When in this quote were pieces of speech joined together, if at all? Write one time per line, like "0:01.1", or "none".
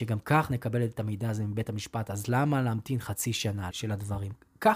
0:03.7

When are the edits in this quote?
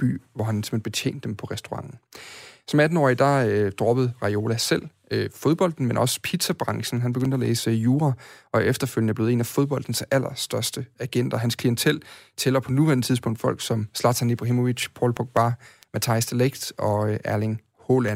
none

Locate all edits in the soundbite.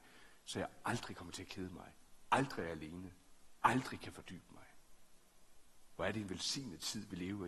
0:03.6

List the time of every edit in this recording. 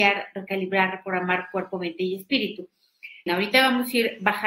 0:03.3

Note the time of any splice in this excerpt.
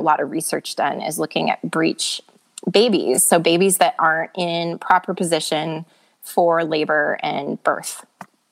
none

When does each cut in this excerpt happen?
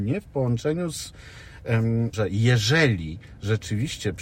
0:02.1

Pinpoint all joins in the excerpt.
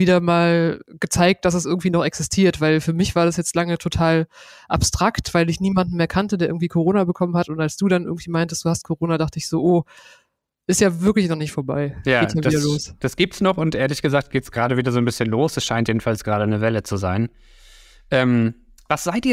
none

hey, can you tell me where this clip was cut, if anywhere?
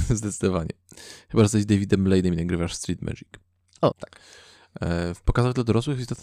0:03.9

